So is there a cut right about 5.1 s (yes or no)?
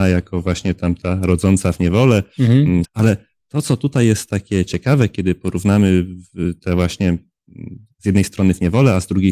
no